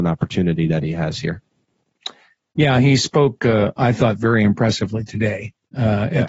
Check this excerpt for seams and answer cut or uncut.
uncut